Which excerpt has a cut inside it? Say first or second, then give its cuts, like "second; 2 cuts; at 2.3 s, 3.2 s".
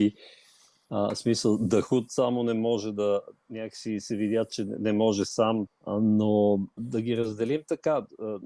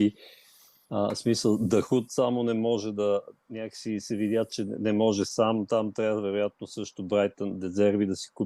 first; 2 cuts; at 5.7 s, 6.8 s